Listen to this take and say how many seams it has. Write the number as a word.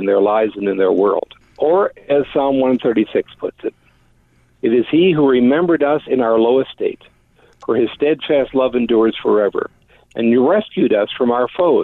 zero